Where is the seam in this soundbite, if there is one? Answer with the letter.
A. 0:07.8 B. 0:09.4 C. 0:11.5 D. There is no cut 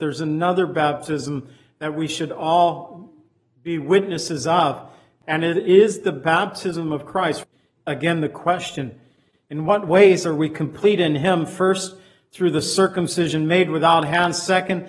D